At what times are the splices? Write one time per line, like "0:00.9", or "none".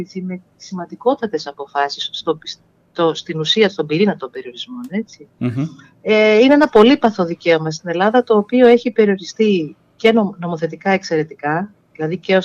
none